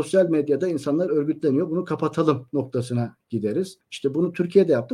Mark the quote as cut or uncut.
uncut